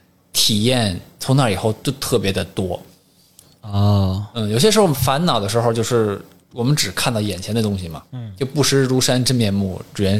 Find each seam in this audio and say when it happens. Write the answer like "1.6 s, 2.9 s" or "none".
4.9 s